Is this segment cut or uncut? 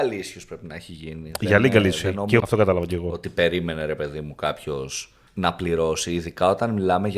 cut